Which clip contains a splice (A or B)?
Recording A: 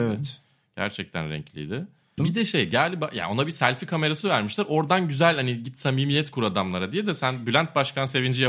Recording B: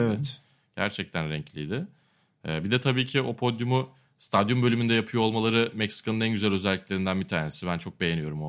A